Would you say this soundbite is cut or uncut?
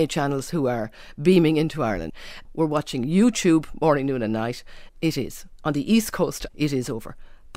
cut